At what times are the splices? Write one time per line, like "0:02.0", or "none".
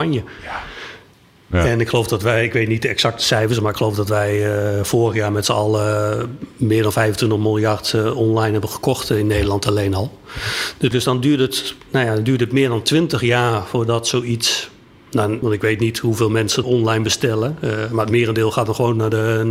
0:10.9
0:15.4
0:16.6